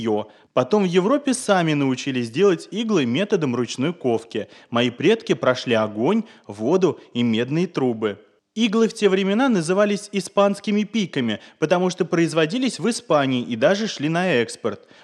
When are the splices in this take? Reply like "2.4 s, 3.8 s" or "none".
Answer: none